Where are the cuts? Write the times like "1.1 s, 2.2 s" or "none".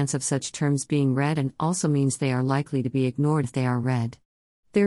3.4 s